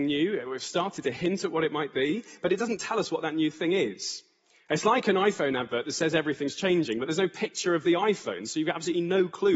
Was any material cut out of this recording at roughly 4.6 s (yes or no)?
no